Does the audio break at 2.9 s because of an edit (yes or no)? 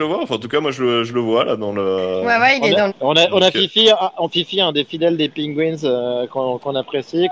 yes